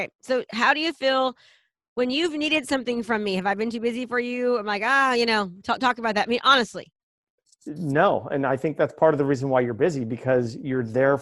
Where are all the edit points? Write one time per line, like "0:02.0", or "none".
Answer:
none